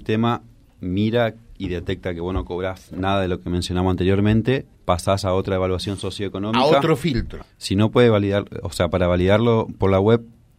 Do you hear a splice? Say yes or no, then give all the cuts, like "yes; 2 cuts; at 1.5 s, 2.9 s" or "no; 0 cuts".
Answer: yes; 2 cuts; at 4.7 s, 7.4 s